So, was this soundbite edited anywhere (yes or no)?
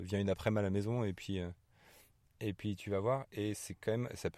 no